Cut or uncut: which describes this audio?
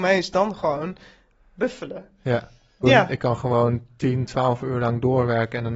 cut